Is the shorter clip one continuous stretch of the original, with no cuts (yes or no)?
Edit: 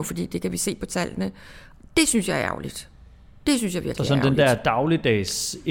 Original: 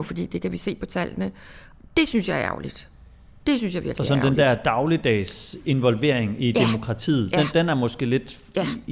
yes